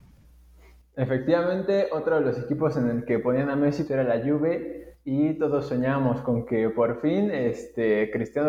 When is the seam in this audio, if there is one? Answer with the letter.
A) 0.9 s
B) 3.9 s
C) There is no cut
B